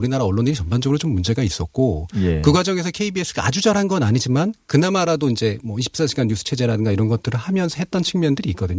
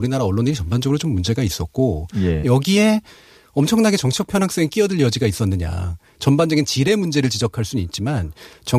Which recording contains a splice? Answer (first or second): second